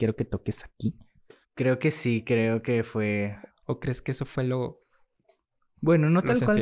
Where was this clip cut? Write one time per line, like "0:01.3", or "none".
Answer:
0:01.4
0:03.5

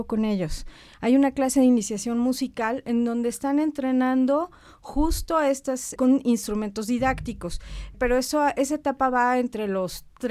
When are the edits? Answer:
0:06.0
0:07.9

